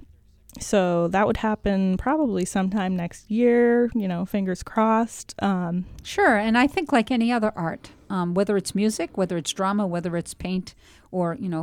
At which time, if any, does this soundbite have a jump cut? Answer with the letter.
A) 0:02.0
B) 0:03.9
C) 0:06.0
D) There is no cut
C